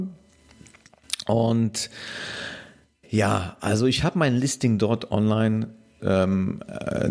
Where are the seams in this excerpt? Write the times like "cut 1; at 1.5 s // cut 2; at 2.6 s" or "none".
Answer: cut 1; at 6.0 s